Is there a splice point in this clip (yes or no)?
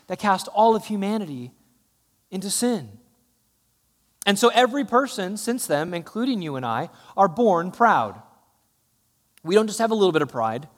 no